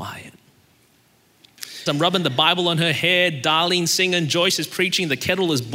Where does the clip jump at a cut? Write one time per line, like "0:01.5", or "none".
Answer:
0:01.9